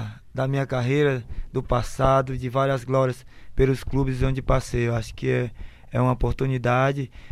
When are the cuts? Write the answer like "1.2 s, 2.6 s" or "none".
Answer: none